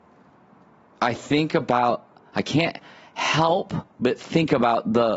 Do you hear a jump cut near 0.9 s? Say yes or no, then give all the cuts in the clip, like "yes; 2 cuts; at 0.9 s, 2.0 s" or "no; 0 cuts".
no; 1 cut; at 3.9 s